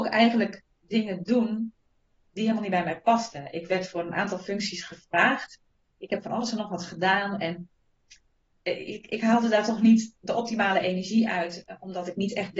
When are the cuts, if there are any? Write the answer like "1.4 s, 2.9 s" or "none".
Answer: none